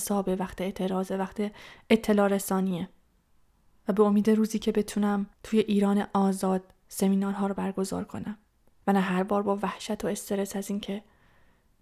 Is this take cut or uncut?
cut